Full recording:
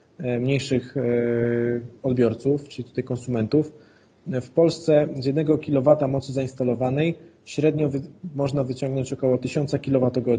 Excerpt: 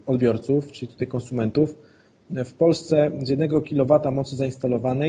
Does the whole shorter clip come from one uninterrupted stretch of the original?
yes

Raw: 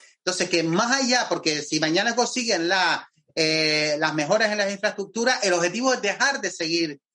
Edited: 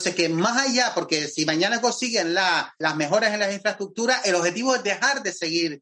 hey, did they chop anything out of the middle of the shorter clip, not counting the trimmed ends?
yes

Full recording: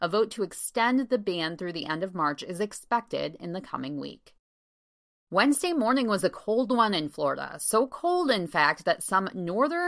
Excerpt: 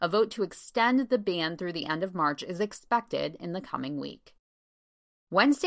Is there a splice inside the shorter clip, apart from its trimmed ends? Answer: no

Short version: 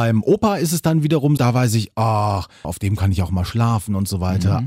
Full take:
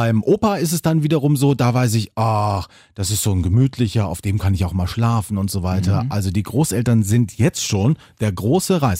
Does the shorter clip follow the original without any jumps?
no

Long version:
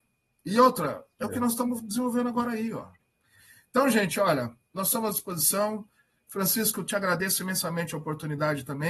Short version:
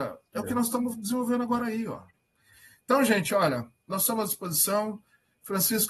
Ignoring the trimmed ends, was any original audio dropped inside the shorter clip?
no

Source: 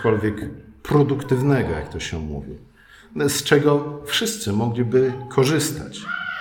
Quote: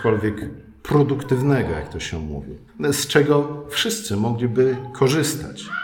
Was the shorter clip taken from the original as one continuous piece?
no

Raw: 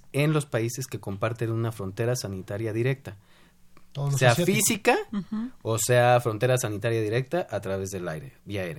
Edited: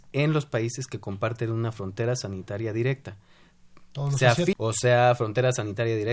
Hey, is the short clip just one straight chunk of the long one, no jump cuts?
no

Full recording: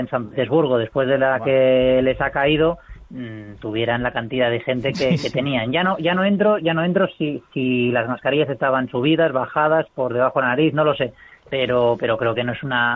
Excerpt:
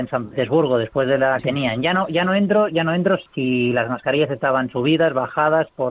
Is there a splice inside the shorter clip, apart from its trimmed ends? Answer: yes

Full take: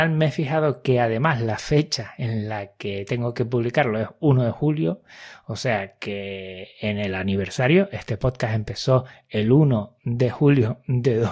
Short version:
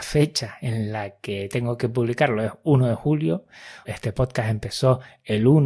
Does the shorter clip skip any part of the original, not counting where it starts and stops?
yes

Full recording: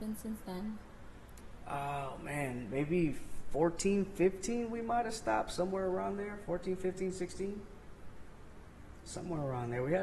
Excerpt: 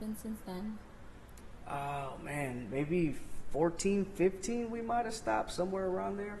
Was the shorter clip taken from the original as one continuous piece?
yes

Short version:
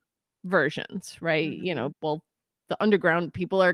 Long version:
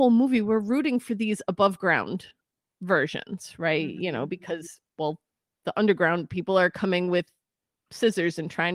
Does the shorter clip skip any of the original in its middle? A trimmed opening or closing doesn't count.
yes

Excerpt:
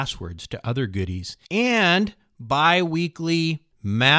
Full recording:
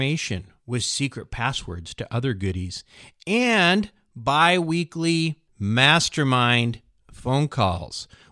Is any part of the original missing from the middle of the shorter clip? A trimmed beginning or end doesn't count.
yes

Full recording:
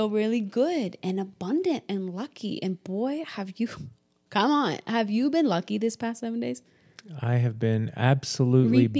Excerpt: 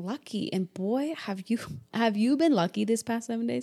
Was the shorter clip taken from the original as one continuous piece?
no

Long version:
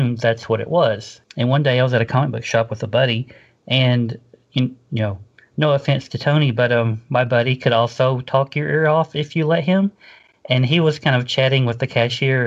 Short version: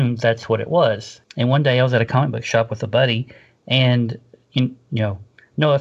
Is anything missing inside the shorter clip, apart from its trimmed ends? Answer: no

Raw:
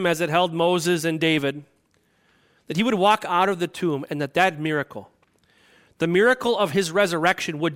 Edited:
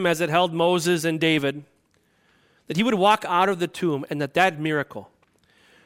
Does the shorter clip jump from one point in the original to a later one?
no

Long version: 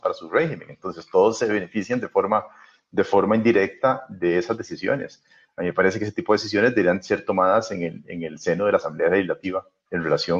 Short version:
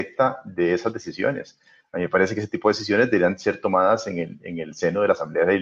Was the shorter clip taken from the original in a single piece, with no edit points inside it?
yes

